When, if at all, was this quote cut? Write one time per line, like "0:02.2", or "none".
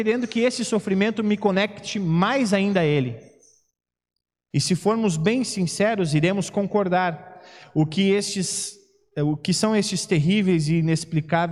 0:04.5